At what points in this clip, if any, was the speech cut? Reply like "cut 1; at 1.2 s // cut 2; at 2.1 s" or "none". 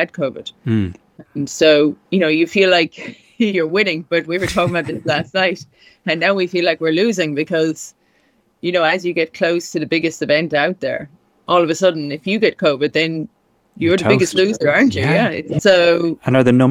cut 1; at 2.1 s // cut 2; at 15.6 s